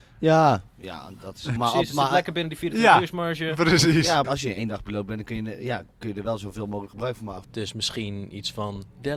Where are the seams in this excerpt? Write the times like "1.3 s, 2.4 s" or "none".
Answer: 1.6 s, 4.2 s, 7.4 s